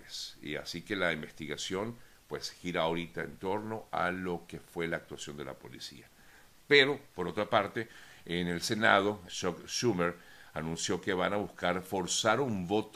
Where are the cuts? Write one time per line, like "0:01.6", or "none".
0:09.3